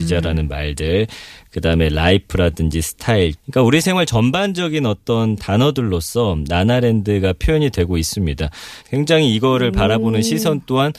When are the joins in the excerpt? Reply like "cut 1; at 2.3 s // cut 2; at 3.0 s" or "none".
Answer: cut 1; at 3.4 s // cut 2; at 8.8 s